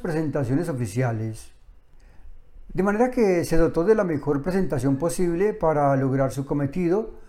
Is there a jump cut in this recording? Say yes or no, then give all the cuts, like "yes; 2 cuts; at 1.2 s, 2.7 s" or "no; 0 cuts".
yes; 1 cut; at 2.7 s